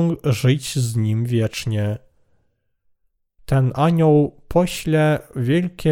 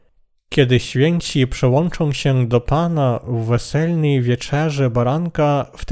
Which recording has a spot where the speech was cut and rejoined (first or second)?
first